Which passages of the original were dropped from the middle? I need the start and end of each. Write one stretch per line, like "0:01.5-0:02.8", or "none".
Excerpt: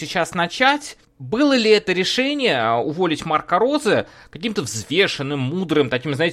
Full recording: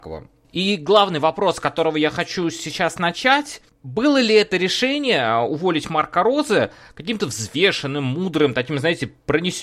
none